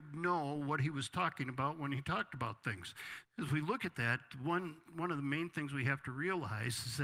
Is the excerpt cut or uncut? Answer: cut